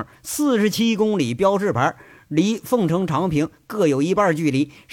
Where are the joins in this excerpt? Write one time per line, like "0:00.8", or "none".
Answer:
none